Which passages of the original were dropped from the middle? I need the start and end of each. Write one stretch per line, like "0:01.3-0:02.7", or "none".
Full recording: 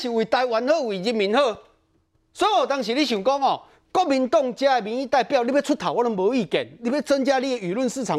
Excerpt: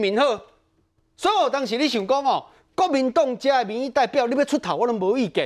none